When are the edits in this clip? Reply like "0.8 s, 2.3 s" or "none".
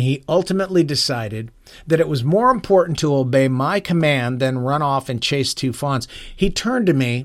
none